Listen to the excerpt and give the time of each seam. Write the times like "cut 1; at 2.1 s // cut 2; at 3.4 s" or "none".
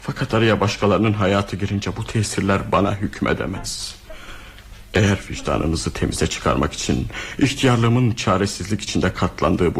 none